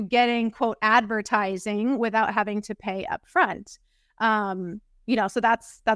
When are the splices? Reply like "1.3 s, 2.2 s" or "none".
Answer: none